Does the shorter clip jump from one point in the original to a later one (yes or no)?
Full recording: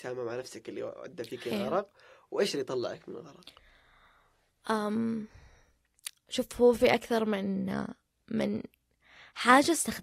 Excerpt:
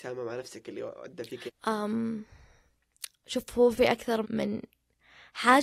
yes